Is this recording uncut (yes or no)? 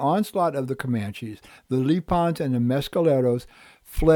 yes